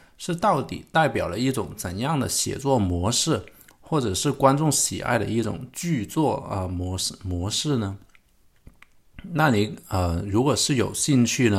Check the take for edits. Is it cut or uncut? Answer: uncut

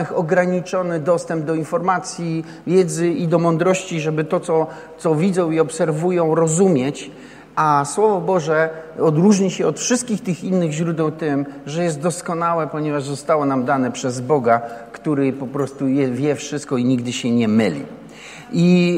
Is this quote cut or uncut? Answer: uncut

